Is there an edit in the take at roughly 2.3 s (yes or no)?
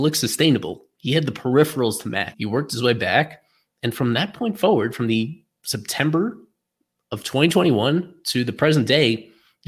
yes